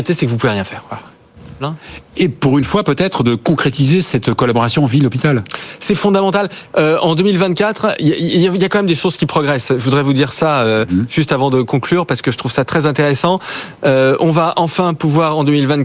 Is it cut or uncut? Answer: cut